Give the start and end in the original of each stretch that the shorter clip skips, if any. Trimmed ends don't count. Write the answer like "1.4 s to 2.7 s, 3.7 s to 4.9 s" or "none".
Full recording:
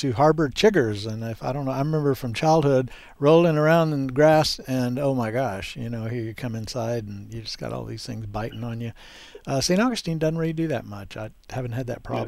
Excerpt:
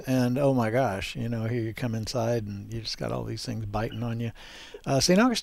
none